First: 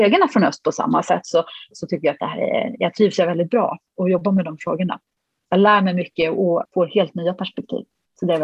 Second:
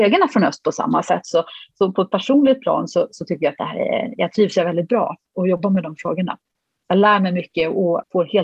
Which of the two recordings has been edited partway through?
first; 1 cut; at 1.7 s

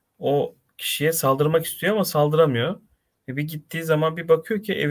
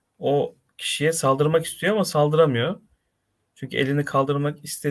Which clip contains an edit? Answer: first; 1 cut; at 3.1 s

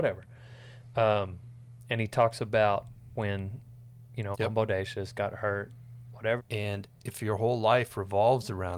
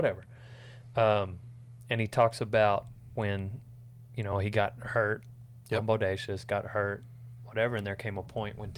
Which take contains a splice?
first; 2 cuts; at 4.3 s, 6.4 s

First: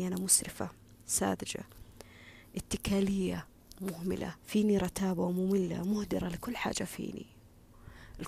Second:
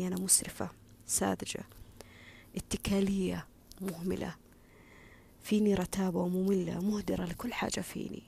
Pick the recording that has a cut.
first; 1 cut; at 4.4 s

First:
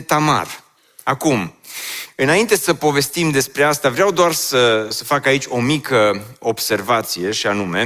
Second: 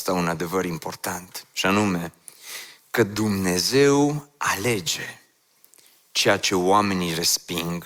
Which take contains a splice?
first; 1 cut; at 4.9 s

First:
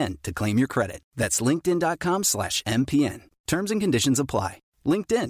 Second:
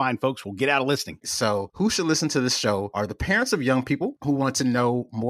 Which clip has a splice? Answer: second; 1 cut; at 1.2 s

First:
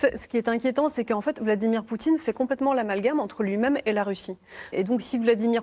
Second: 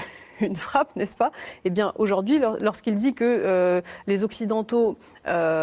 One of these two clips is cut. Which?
first; 1 cut; at 4.7 s

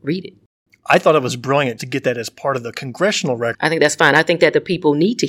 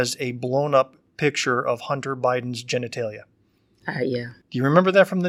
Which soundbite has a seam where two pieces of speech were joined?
first; 2 cuts; at 1.8 s, 3.5 s

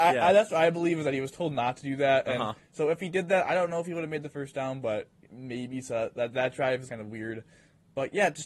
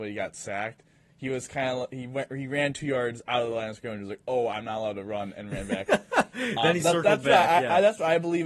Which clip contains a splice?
first; 1 cut; at 6.9 s

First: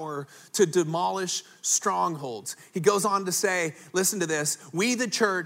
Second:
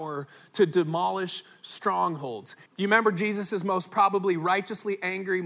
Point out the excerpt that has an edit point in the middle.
second; 1 cut; at 2.7 s

